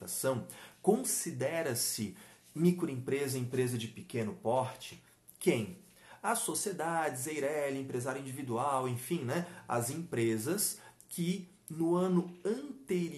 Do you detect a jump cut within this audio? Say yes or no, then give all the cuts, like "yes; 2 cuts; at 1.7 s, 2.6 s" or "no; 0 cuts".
no; 0 cuts